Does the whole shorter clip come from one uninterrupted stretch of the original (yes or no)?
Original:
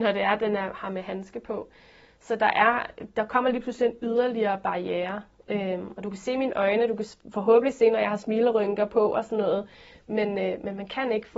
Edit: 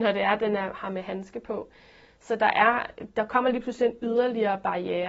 yes